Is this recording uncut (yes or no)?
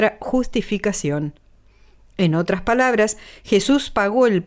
yes